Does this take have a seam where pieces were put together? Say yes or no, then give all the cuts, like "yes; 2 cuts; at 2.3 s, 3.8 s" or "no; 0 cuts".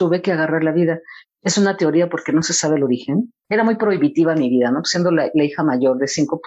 yes; 2 cuts; at 1.2 s, 3.4 s